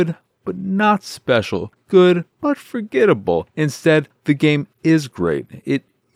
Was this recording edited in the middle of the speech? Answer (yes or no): yes